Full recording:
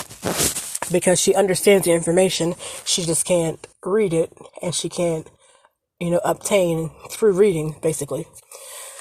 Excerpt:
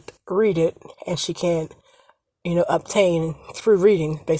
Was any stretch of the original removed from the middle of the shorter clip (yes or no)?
no